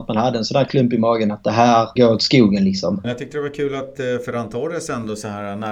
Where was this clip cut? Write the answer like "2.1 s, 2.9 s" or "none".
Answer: 2.0 s, 3.0 s